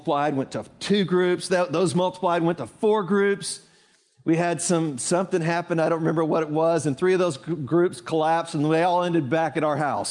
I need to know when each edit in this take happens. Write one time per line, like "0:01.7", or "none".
none